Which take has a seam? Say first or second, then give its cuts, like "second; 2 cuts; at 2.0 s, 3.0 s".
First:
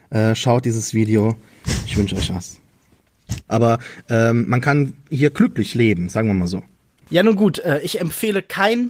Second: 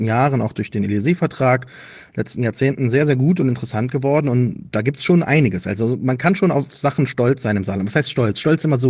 first; 2 cuts; at 3.5 s, 7.0 s